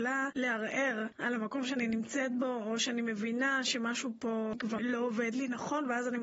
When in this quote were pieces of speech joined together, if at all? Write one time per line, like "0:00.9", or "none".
0:04.8